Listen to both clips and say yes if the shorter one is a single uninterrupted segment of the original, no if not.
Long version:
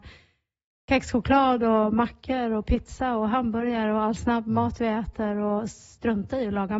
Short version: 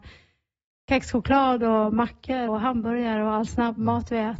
no